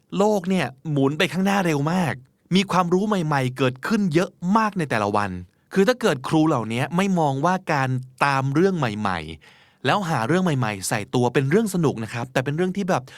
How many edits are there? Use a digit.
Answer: 0